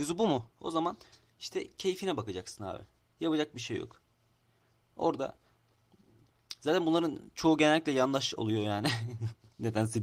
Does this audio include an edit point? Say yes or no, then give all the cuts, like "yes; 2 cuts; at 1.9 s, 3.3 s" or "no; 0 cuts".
no; 0 cuts